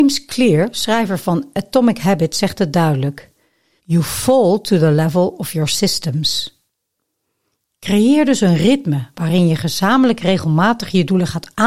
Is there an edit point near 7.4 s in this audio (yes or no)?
no